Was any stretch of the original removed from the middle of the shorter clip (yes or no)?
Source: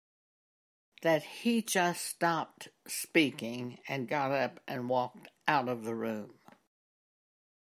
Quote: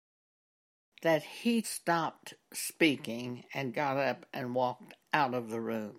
yes